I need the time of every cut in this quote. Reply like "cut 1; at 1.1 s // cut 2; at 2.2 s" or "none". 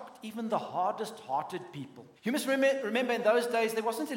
cut 1; at 2.2 s